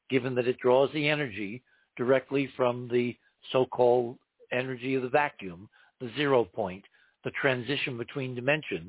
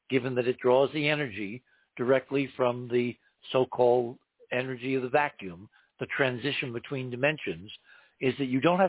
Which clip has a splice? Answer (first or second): second